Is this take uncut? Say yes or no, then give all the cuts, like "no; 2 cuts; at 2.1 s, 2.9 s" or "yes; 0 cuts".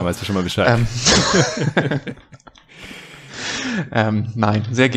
yes; 0 cuts